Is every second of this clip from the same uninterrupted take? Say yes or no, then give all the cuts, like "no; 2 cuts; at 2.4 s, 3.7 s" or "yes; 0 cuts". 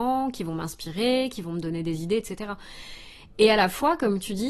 yes; 0 cuts